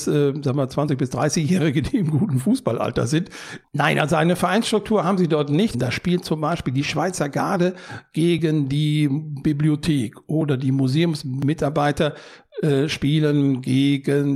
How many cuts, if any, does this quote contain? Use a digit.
2